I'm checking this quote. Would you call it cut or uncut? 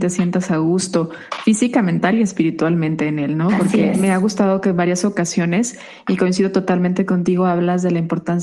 uncut